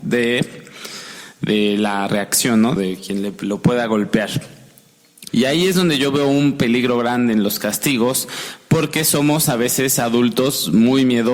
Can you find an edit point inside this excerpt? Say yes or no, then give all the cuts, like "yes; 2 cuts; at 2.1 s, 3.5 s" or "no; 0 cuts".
yes; 2 cuts; at 2.8 s, 5.3 s